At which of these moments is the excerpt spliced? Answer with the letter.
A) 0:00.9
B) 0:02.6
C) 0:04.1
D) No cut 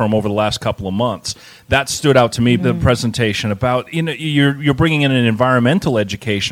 B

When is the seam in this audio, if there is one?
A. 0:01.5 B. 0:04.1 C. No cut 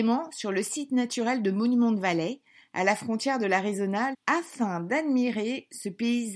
B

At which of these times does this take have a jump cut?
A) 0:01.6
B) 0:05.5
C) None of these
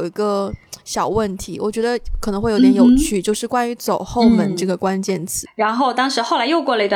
B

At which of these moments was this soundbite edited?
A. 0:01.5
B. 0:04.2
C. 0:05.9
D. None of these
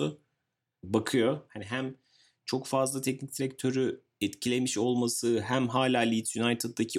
A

